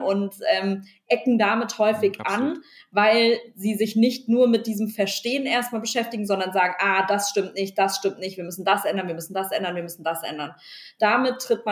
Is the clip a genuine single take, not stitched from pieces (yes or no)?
yes